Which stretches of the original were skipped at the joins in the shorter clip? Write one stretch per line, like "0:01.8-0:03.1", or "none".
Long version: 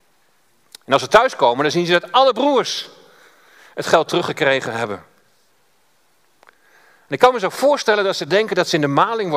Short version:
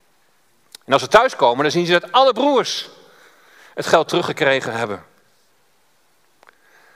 none